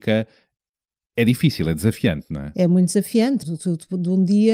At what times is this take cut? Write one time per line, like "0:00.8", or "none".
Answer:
0:03.4